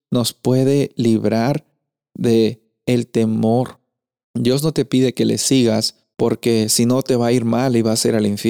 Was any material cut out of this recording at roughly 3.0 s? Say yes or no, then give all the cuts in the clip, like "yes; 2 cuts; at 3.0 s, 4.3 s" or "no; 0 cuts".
no; 2 cuts; at 4.2 s, 6.1 s